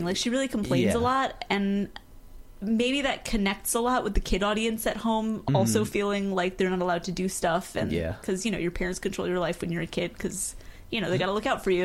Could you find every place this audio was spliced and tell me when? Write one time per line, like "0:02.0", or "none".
none

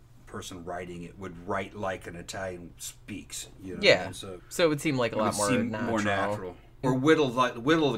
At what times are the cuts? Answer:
0:04.4
0:06.8

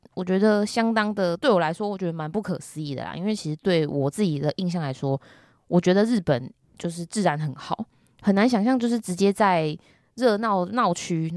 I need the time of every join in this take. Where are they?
none

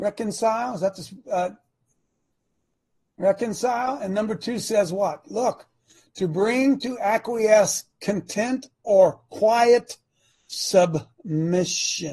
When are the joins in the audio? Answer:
none

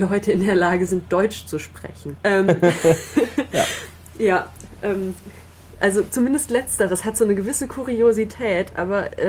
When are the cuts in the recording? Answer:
0:02.2

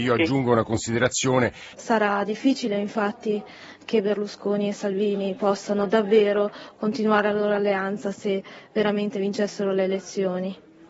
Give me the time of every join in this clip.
0:01.7

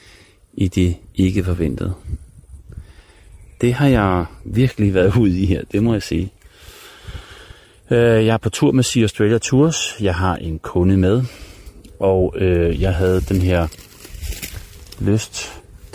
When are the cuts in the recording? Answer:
none

